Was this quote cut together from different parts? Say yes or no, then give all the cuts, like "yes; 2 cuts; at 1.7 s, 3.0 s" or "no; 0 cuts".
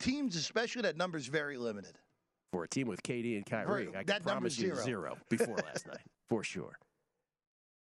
no; 0 cuts